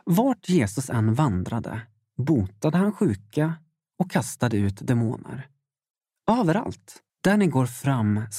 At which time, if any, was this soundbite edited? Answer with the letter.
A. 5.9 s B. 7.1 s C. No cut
B